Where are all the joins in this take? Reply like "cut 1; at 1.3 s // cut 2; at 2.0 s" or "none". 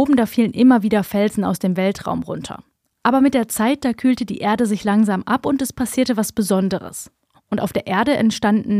cut 1; at 7.3 s

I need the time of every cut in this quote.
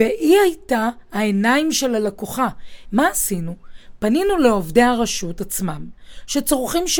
cut 1; at 2.8 s

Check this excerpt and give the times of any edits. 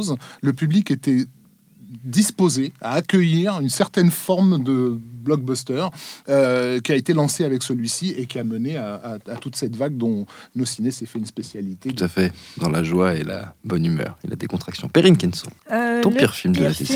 cut 1; at 15.6 s

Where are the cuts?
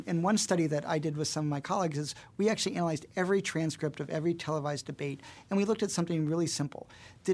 none

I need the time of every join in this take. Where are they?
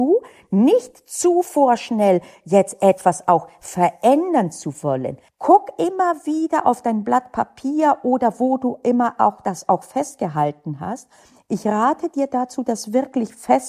cut 1; at 5.3 s

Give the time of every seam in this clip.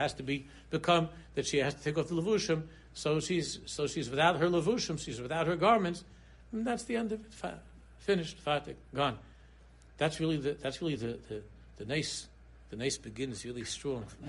none

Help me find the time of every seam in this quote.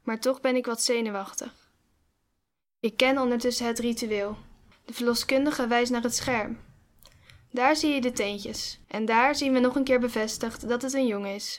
cut 1; at 4.7 s // cut 2; at 8.8 s

